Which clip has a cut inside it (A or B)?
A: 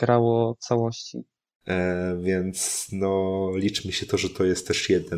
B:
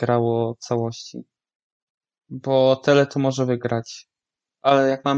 A